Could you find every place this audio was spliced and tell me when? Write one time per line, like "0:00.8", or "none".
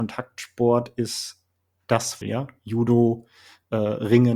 0:02.2